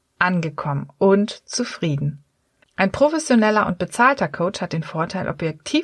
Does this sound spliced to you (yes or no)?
yes